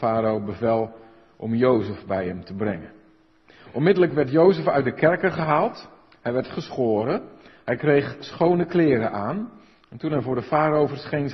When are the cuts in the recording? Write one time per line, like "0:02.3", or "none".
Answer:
none